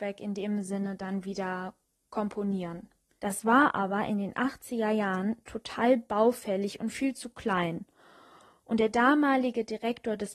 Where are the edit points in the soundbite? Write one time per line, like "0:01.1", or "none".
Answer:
0:03.2